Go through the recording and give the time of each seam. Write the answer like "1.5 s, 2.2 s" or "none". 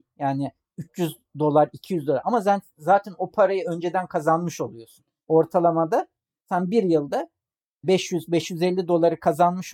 none